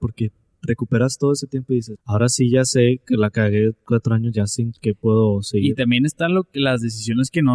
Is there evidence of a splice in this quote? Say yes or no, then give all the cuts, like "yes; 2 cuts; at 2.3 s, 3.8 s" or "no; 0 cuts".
yes; 1 cut; at 2.0 s